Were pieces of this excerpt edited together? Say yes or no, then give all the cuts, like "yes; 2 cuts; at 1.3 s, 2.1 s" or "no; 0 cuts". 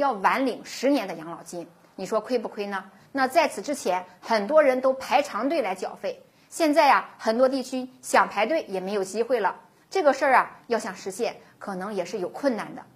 yes; 2 cuts; at 3.0 s, 9.8 s